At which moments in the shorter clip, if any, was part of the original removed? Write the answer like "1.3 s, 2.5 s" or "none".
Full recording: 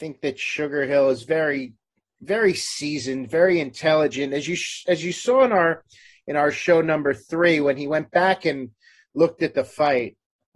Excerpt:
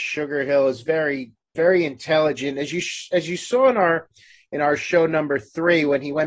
1.5 s